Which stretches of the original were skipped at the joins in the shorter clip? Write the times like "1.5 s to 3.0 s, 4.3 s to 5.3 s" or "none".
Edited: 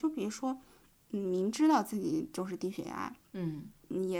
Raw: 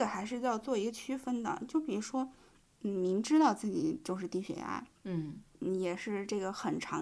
none